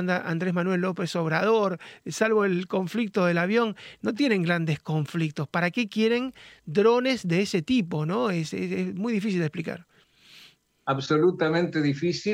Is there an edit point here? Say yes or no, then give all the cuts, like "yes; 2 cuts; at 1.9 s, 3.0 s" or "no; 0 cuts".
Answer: no; 0 cuts